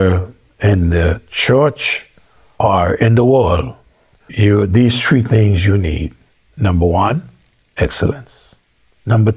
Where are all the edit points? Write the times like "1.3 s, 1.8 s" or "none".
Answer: none